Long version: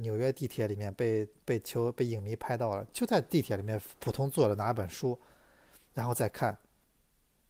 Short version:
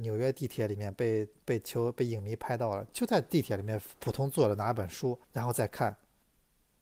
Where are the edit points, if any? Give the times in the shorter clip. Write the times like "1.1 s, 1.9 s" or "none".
5.2 s